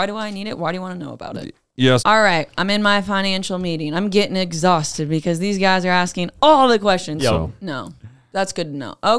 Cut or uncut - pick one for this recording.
cut